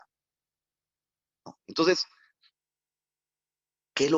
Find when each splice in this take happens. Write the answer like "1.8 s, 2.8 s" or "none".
1.6 s